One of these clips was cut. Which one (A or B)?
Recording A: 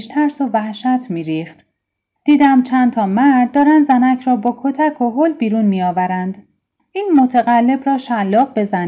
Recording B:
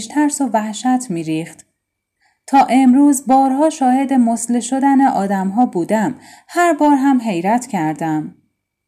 A